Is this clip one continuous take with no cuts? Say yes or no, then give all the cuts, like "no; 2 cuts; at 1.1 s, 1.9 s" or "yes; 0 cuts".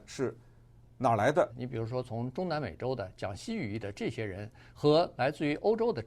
no; 1 cut; at 1.5 s